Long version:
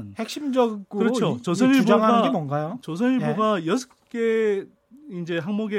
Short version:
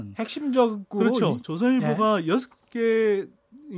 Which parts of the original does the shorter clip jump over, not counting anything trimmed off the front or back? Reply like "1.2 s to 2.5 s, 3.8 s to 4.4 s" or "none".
1.4 s to 2.8 s